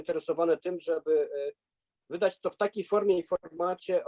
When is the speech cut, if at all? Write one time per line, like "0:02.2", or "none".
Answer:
none